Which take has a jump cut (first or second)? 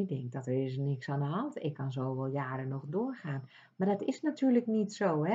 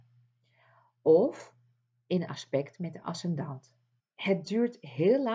second